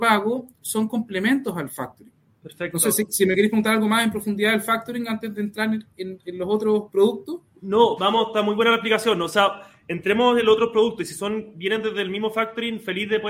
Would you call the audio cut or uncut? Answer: cut